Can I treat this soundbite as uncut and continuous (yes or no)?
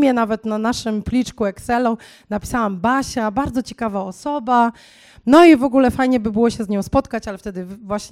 yes